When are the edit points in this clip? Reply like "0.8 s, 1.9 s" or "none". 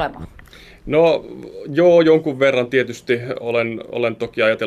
none